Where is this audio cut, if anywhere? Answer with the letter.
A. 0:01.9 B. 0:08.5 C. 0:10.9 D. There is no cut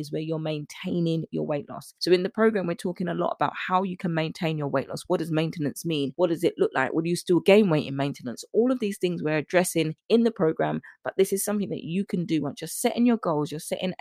D